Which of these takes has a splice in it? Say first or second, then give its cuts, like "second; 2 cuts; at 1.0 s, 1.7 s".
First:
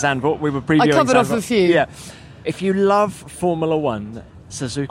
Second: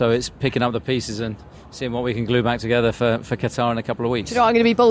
first; 1 cut; at 2.4 s